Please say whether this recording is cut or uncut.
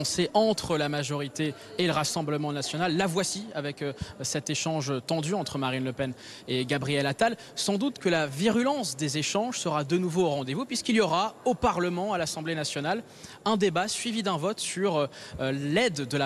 uncut